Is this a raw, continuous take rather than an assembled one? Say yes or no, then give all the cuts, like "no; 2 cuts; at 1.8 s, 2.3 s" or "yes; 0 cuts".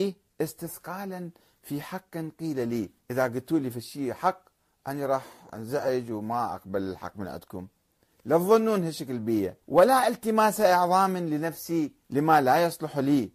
no; 3 cuts; at 3.0 s, 9.6 s, 12.0 s